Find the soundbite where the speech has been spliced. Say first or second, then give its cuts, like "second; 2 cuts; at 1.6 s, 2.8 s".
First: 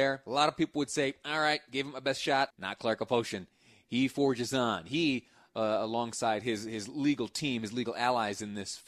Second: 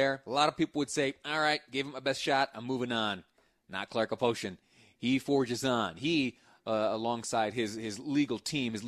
first; 1 cut; at 2.5 s